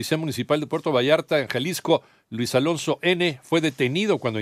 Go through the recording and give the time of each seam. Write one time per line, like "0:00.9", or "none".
none

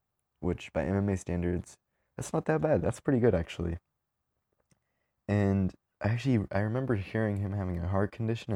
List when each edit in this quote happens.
none

